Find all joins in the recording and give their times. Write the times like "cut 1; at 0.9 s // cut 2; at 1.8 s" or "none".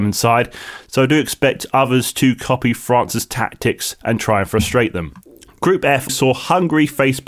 cut 1; at 6.1 s